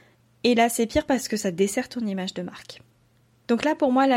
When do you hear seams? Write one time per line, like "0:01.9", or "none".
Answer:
none